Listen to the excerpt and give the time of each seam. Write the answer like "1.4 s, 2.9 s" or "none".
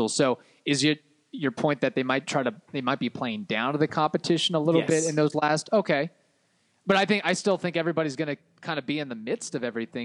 none

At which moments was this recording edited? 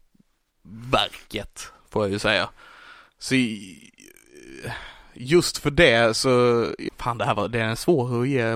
6.9 s

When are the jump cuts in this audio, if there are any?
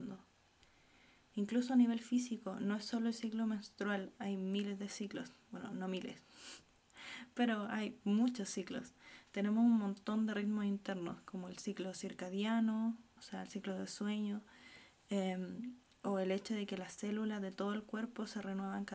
none

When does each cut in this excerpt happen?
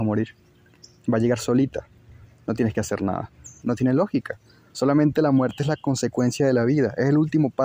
3.6 s

